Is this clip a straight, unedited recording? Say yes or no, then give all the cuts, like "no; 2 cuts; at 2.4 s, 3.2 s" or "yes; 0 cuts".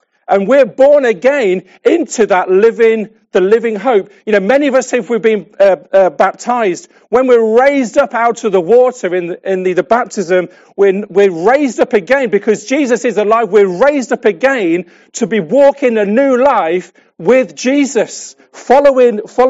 yes; 0 cuts